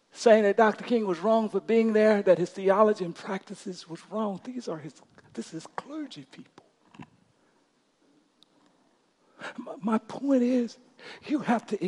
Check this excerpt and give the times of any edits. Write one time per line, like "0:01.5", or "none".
none